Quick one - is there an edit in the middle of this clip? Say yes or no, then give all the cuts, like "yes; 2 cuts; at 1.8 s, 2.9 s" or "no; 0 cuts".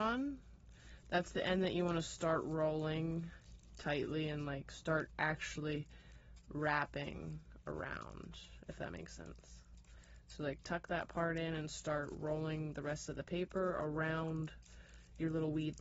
no; 0 cuts